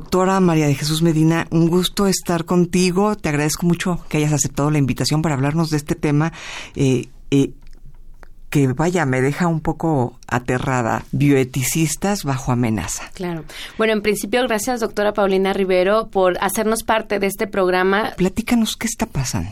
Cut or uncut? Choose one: cut